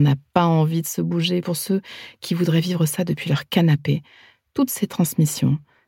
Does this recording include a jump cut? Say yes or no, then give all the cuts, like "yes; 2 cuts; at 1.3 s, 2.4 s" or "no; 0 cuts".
no; 0 cuts